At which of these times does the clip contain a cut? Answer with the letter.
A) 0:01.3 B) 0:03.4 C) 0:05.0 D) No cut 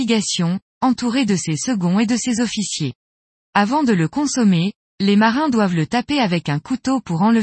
B